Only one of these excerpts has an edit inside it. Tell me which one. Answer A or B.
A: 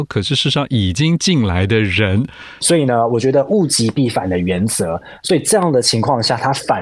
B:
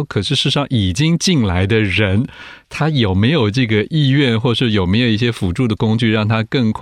A